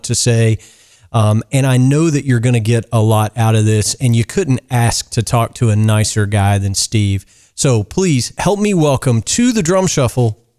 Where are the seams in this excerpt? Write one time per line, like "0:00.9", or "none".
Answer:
0:01.0

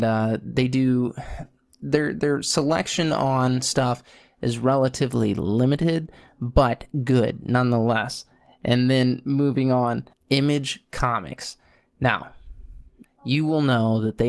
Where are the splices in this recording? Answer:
0:10.1
0:13.0

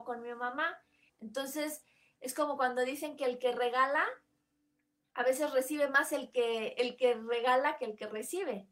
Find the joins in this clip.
0:01.1

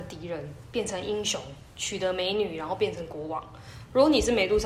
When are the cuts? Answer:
none

